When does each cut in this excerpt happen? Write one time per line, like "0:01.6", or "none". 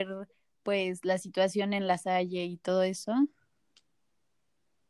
none